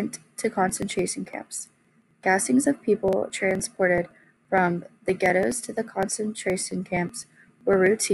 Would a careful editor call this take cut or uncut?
uncut